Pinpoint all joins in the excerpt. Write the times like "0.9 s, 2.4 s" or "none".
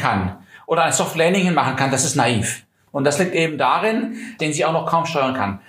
2.9 s, 4.4 s